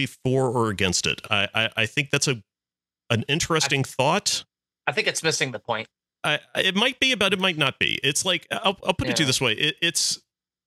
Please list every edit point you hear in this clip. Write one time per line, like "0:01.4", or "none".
none